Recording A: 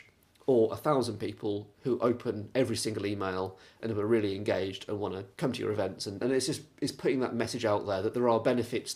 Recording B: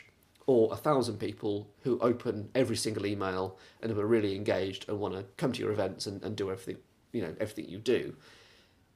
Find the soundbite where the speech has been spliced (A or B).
A